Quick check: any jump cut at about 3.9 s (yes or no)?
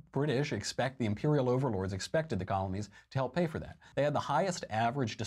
yes